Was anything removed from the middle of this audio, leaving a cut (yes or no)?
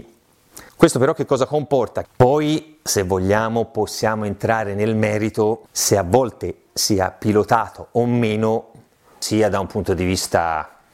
yes